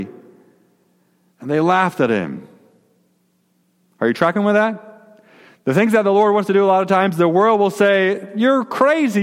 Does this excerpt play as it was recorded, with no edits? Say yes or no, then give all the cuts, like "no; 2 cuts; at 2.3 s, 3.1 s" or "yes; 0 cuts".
yes; 0 cuts